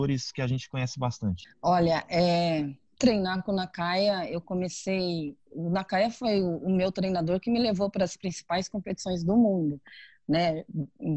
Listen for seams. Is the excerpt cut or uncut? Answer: uncut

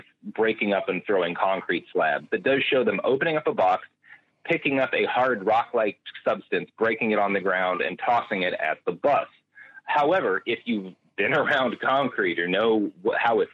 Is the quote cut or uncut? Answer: uncut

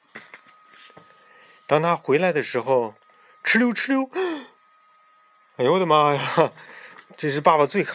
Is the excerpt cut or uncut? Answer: uncut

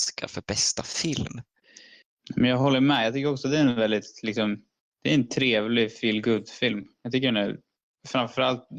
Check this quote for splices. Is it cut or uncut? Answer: uncut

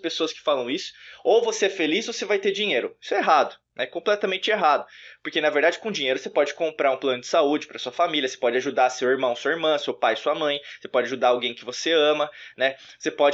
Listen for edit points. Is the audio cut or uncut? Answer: uncut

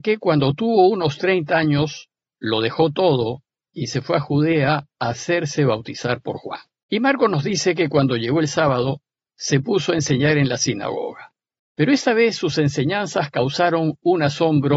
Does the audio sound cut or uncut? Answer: cut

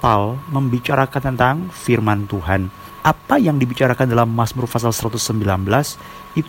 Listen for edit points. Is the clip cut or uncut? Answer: uncut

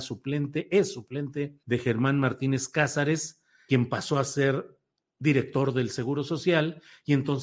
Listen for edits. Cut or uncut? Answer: cut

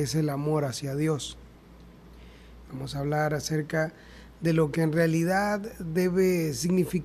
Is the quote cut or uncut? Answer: cut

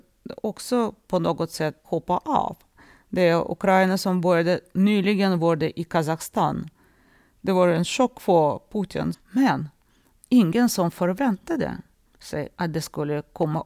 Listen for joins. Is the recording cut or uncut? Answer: cut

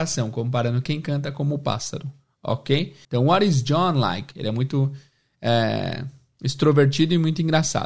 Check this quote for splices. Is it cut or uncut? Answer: cut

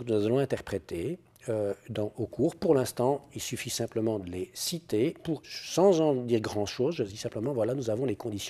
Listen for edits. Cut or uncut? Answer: cut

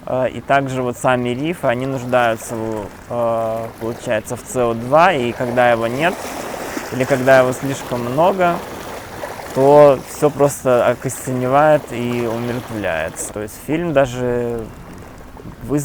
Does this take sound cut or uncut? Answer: cut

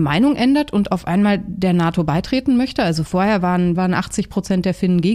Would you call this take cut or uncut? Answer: cut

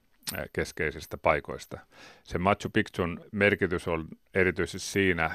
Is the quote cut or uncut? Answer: uncut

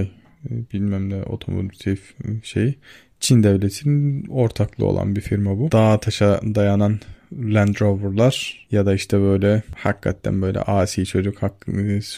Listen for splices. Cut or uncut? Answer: cut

